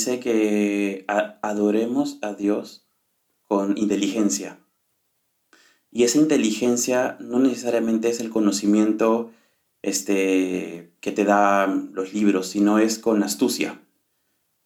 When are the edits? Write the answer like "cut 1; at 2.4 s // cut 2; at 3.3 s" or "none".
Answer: cut 1; at 11.0 s